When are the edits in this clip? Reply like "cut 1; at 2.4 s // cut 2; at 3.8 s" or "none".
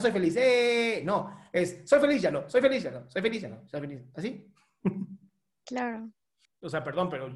cut 1; at 6.5 s